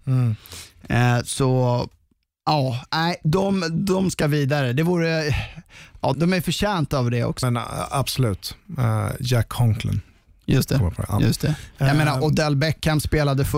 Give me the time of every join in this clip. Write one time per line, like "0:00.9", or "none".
0:06.1
0:07.4